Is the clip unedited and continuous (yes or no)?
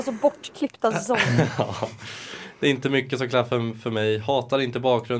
yes